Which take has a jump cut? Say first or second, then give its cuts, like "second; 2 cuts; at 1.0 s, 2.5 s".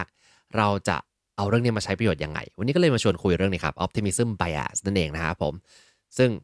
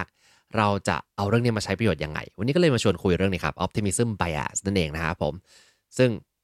second; 1 cut; at 1.1 s